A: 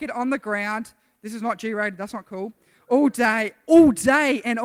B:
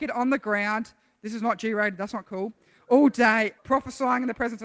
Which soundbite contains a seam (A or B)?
B